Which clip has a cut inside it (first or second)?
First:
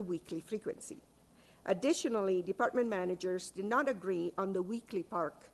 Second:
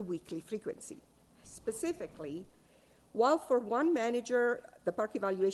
second